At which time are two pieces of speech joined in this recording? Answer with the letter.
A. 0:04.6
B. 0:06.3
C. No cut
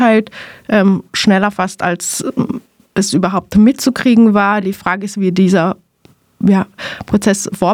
C